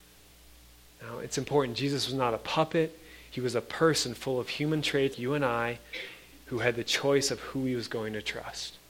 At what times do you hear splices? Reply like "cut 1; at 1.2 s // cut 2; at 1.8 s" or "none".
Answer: cut 1; at 3.3 s // cut 2; at 5.1 s